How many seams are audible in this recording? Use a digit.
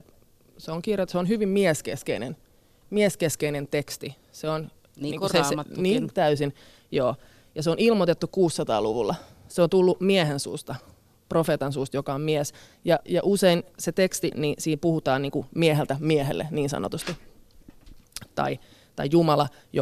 3